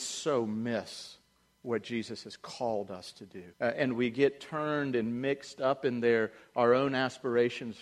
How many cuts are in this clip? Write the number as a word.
one